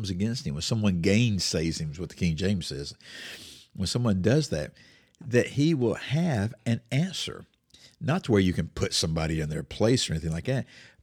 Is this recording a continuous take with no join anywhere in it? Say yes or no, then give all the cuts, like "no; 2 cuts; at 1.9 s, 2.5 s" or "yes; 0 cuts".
yes; 0 cuts